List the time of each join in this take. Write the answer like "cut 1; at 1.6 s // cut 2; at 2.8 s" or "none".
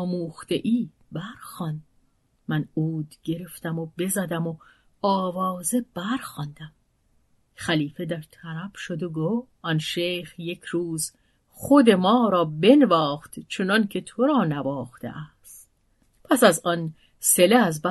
cut 1; at 9.6 s